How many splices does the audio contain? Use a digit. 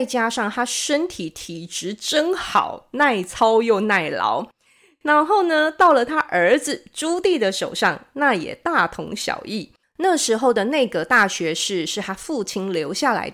1